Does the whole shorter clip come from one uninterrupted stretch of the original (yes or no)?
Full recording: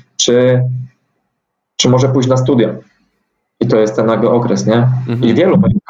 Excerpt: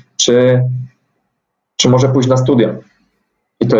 yes